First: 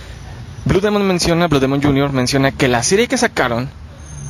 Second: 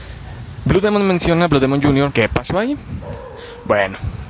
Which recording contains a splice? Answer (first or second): second